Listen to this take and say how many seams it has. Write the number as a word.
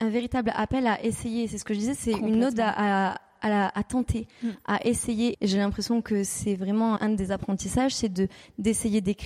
two